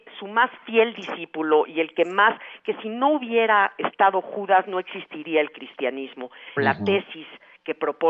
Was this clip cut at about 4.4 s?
no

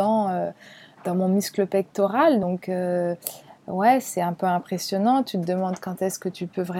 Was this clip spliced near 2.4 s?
no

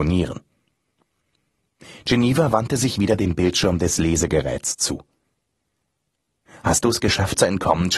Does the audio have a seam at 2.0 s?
no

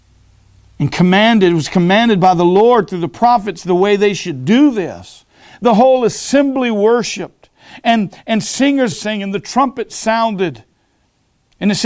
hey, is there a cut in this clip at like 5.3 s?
no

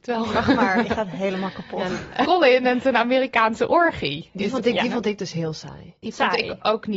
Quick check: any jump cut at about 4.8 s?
no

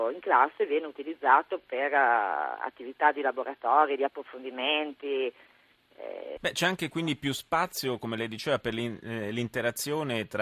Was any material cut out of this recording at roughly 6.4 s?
yes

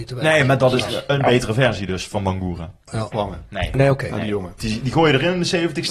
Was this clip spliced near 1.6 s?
no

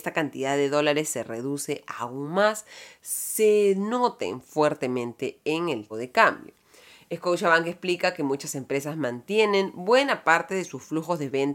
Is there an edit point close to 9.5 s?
no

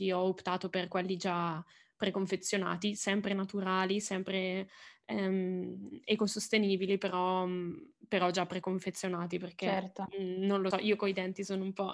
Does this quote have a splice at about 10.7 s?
yes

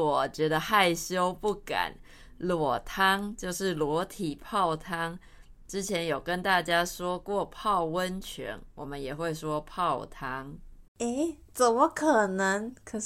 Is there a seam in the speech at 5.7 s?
no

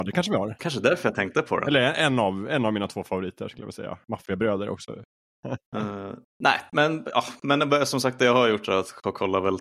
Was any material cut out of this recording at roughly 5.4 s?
yes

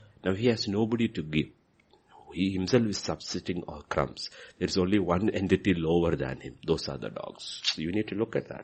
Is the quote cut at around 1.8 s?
no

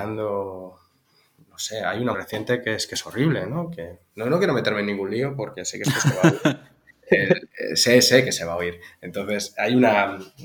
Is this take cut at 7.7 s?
no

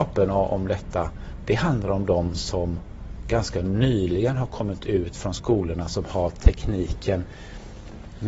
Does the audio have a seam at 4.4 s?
no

